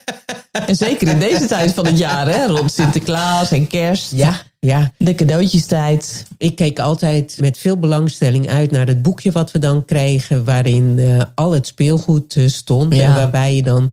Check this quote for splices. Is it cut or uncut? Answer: cut